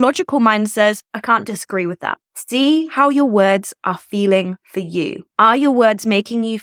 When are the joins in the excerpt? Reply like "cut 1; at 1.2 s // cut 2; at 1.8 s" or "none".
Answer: cut 1; at 1.1 s // cut 2; at 2.2 s